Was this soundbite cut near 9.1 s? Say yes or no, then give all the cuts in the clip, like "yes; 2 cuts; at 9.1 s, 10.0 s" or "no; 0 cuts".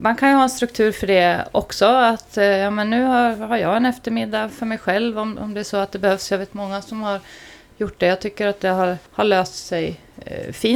yes; 1 cut; at 9.1 s